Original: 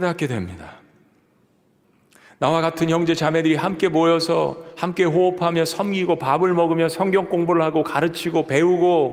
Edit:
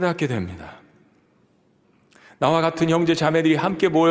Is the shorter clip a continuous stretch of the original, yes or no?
yes